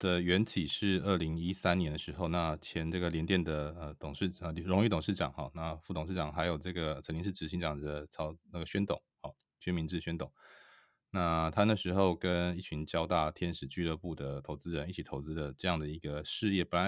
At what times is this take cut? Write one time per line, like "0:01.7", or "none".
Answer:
none

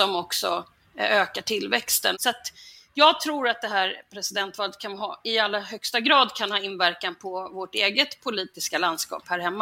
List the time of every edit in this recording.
0:02.1

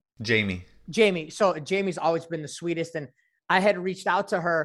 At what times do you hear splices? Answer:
none

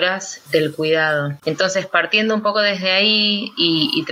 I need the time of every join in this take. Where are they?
0:01.4

